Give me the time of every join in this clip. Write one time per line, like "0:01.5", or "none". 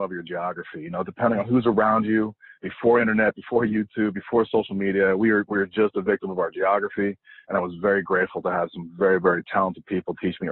none